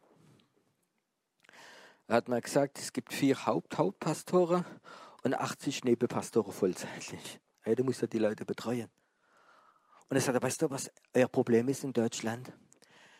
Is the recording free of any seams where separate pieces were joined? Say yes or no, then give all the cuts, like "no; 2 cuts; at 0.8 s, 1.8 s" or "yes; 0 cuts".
yes; 0 cuts